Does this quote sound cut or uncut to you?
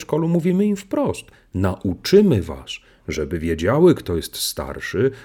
uncut